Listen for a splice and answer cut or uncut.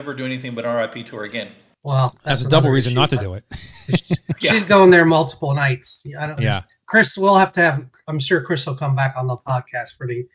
cut